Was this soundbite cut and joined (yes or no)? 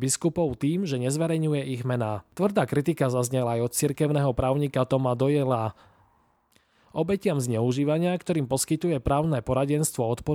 no